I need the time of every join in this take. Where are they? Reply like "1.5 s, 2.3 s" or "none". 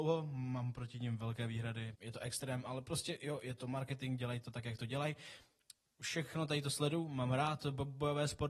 1.9 s